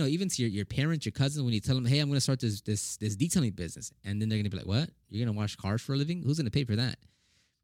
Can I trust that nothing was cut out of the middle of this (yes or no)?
yes